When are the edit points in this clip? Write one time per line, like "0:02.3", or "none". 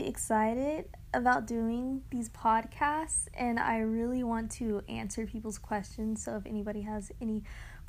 none